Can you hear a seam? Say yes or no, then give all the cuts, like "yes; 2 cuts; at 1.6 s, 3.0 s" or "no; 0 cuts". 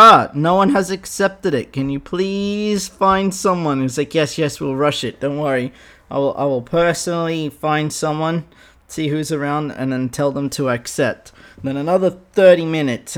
no; 0 cuts